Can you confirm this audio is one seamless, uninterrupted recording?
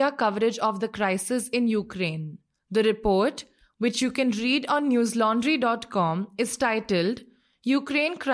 yes; 0 cuts

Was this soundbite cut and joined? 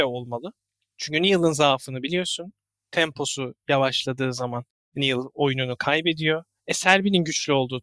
no; 0 cuts

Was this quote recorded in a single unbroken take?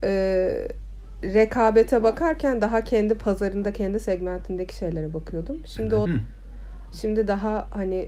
no; 1 cut; at 6.0 s

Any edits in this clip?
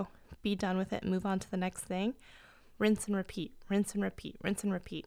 yes; 1 cut; at 2.7 s

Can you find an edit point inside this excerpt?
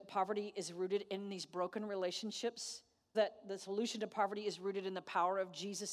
yes; 1 cut; at 3.1 s

